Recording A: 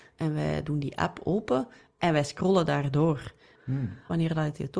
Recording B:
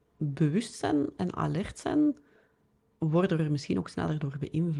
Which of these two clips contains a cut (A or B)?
A